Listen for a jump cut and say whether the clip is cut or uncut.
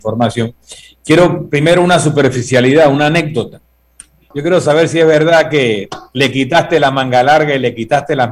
cut